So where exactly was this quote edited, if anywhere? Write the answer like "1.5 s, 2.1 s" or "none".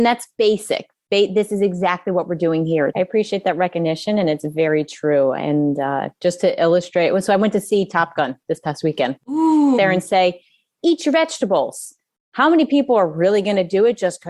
2.9 s, 9.8 s